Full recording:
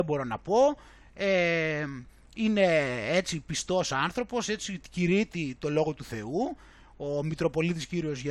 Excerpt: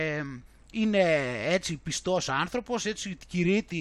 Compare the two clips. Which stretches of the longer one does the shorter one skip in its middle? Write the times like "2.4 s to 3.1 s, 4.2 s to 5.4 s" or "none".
none